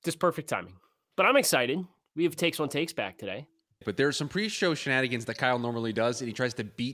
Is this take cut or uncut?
cut